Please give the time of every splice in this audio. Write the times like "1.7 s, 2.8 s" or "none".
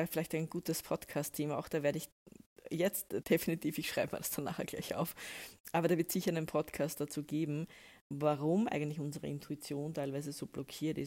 3.2 s

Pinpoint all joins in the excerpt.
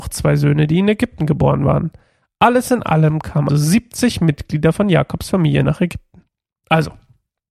3.5 s

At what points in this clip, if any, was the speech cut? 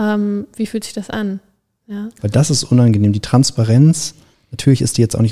2.2 s

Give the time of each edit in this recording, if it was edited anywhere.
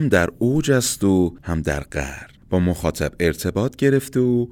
2.4 s

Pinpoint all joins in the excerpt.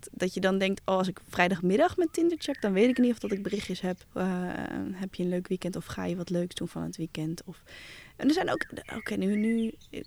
4.0 s

